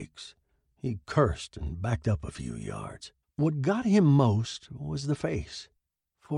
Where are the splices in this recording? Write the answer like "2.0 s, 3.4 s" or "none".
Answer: 3.2 s